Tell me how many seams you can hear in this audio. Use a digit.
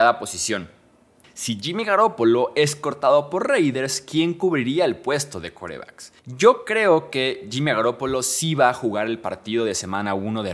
2